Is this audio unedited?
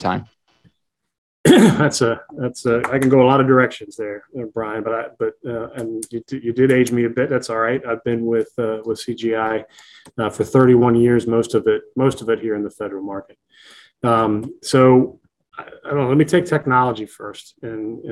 yes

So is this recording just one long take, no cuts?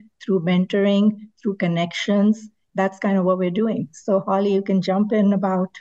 yes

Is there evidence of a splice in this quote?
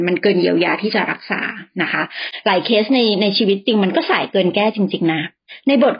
no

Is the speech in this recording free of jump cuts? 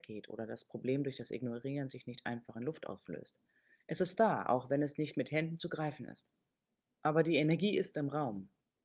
yes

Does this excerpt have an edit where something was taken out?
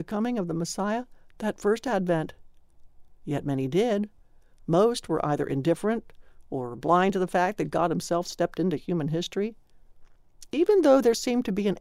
no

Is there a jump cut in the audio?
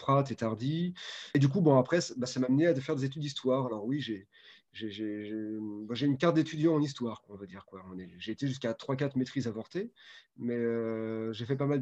no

